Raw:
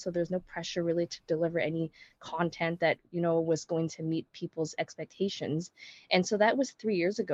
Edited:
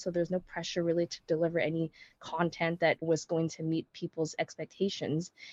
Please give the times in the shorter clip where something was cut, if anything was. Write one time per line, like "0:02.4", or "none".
0:03.0